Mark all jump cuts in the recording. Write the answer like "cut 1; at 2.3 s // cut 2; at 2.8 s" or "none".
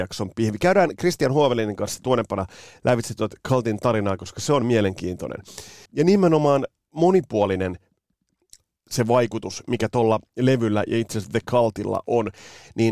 cut 1; at 5.9 s